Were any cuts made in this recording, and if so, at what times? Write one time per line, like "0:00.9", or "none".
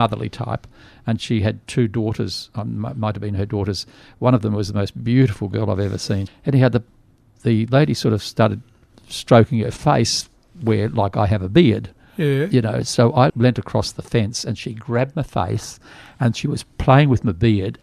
0:06.3
0:13.3